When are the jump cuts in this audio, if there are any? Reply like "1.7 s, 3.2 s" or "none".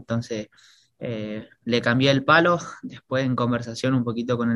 none